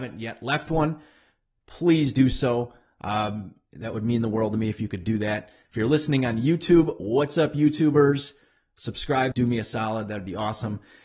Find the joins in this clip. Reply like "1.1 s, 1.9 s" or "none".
5.7 s, 9.3 s

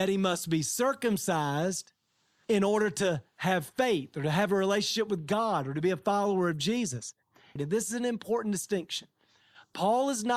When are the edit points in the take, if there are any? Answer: 7.6 s

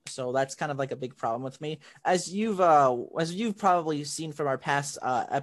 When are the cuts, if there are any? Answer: none

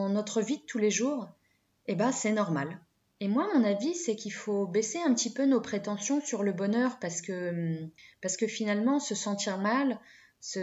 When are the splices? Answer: none

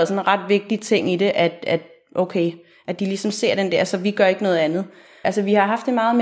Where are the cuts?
5.2 s

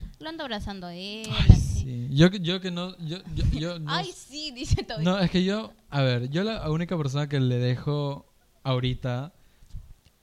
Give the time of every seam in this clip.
none

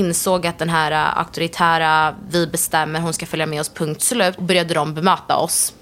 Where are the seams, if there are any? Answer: 4.4 s

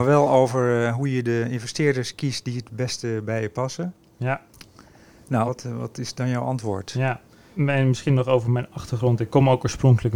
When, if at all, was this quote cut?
5.5 s

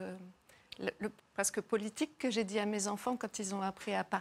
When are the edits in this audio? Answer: 1.2 s

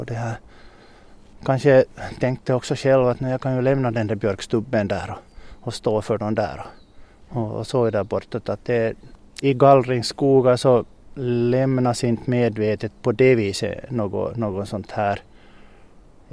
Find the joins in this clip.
9.4 s

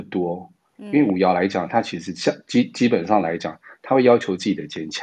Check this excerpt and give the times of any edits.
none

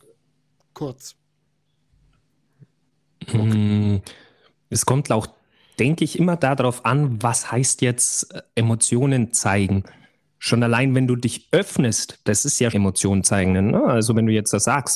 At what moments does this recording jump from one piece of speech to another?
12.7 s

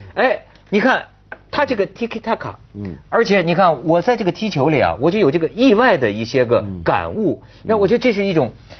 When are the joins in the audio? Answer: none

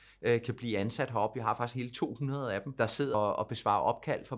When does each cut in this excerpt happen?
3.1 s

